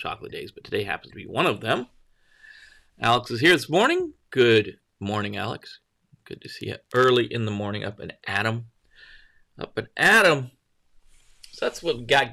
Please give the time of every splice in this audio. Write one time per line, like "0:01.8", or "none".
none